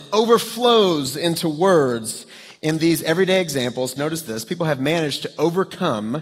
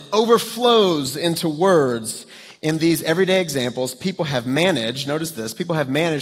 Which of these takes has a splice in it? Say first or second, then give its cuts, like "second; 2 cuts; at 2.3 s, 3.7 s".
first; 1 cut; at 4.0 s